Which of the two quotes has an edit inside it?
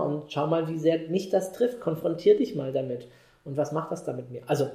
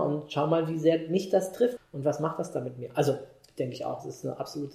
second; 1 cut; at 1.8 s

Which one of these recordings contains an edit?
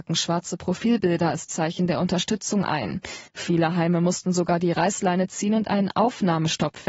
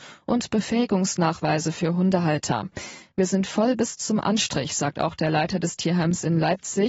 first; 1 cut; at 3.3 s

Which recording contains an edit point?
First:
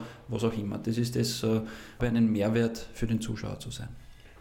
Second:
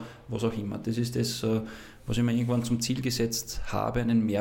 first; 1 cut; at 2.0 s

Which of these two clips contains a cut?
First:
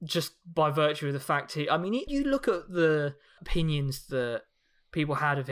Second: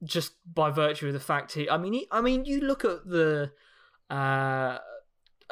first; 2 cuts; at 2.1 s, 3.4 s

